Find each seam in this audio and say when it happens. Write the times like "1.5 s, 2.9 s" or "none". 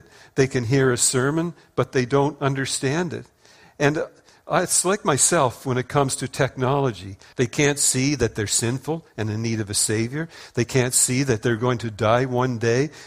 7.3 s